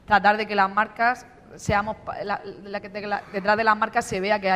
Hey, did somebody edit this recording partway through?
no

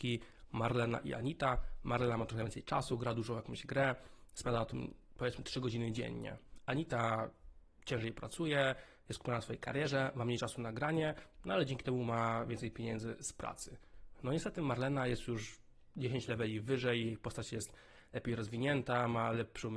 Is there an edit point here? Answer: yes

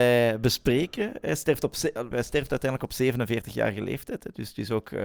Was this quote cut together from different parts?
yes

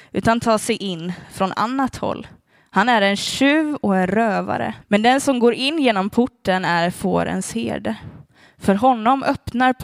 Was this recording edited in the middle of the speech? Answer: yes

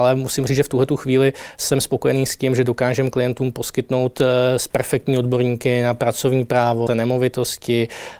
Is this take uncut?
no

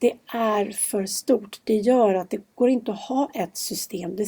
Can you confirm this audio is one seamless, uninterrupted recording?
yes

